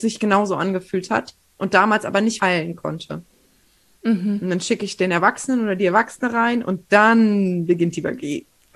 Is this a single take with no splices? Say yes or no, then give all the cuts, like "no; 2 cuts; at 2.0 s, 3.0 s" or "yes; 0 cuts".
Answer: no; 1 cut; at 2.4 s